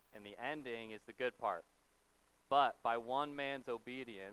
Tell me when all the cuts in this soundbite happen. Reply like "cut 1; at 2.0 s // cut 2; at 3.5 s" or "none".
none